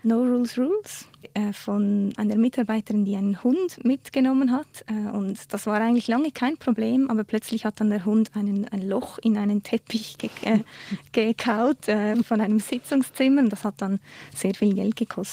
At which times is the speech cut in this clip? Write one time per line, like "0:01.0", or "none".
0:12.2